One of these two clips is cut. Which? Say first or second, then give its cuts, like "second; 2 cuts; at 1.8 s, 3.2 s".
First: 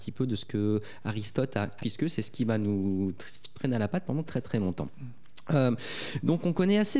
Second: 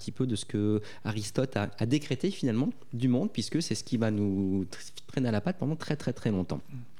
first; 2 cuts; at 1.8 s, 4.2 s